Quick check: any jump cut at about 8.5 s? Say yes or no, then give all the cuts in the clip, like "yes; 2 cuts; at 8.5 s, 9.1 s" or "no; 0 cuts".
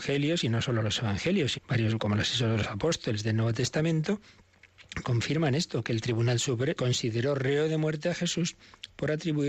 no; 3 cuts; at 1.5 s, 5.0 s, 6.7 s